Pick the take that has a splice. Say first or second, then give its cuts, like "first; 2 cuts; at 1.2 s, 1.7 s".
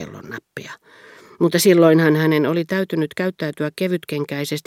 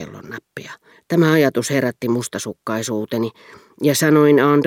second; 1 cut; at 0.9 s